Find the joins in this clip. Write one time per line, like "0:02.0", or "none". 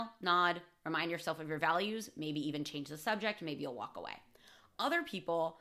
none